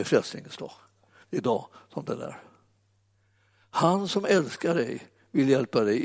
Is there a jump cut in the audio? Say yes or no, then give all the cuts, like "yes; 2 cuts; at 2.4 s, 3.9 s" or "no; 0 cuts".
yes; 1 cut; at 1.2 s